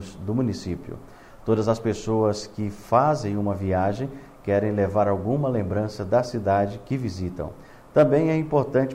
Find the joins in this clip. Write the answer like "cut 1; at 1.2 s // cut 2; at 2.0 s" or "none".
cut 1; at 1.3 s